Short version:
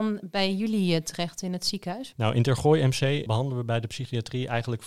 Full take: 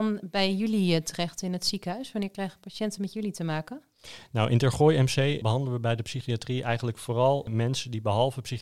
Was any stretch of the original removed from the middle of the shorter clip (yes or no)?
yes